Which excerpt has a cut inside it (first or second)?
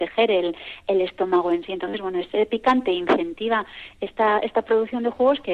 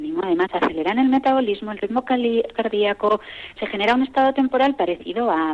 second